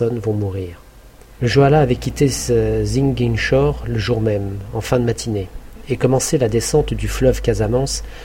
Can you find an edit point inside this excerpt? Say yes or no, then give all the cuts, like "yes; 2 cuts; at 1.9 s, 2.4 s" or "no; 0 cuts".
yes; 1 cut; at 1.4 s